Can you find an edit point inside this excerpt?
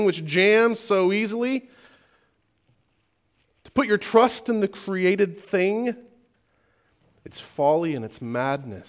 no; 0 cuts

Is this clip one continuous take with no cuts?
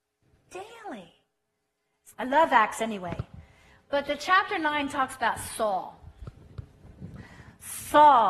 no; 1 cut; at 2.1 s

